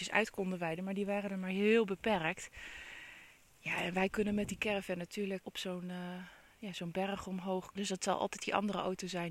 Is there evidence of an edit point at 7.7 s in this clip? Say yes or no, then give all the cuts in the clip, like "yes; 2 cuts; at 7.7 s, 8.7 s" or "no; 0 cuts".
yes; 2 cuts; at 5.4 s, 7.7 s